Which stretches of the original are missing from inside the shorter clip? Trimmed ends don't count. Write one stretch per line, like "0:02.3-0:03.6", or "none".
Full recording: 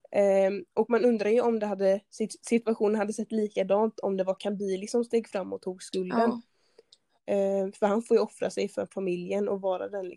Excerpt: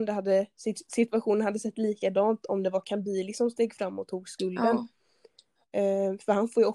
none

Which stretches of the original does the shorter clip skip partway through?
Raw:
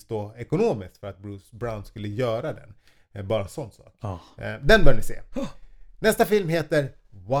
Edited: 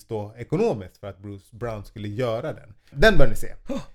0:02.9-0:04.6

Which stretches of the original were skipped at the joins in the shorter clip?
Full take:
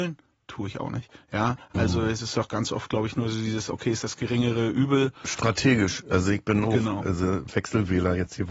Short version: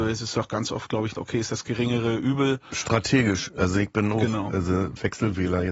0:03.2-0:03.7

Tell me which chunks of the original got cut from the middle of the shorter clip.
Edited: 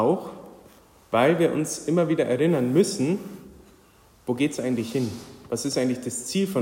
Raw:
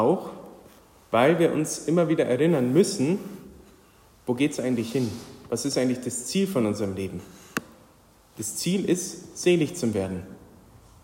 none

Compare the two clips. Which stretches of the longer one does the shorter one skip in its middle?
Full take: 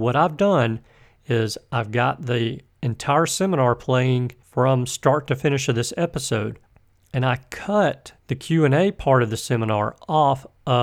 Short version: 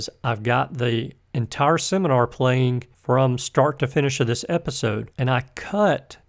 0:06.6-0:07.1

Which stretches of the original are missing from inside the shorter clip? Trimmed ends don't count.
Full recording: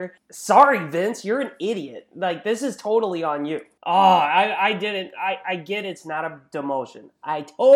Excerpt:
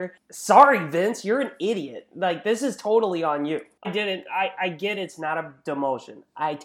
0:03.8-0:04.7

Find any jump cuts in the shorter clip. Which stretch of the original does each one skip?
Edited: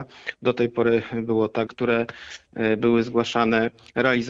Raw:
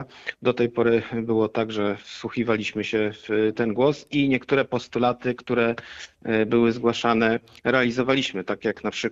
0:01.7-0:05.4

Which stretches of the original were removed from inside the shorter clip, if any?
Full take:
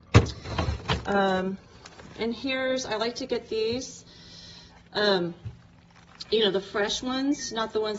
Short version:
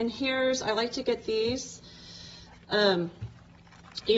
none

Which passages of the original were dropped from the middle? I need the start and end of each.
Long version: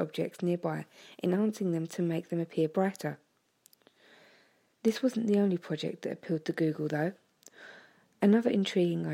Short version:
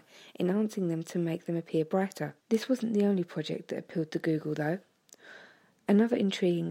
0:03.2-0:04.7

